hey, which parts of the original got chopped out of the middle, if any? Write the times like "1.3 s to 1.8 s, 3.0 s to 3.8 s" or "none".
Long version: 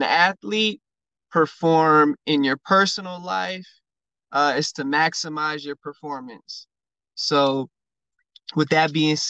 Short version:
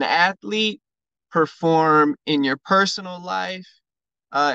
none